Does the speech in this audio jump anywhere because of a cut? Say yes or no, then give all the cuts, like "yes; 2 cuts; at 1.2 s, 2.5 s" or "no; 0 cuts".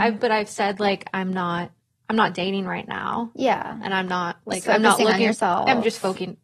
no; 0 cuts